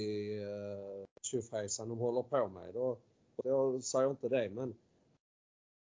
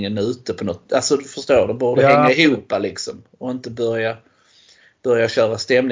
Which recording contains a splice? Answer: first; 1 cut; at 3.4 s

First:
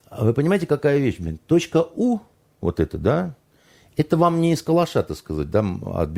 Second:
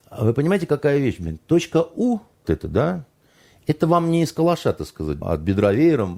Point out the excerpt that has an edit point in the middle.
second; 2 cuts; at 2.4 s, 5.2 s

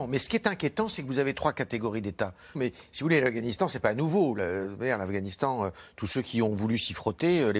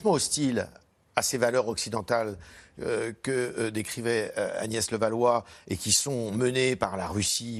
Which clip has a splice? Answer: first; 1 cut; at 2.6 s

